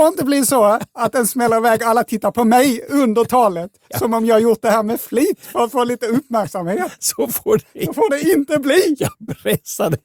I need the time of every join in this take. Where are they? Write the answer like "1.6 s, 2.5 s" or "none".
none